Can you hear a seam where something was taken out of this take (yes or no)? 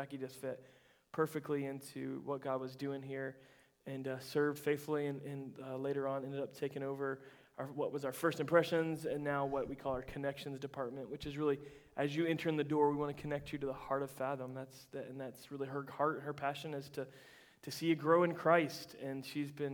no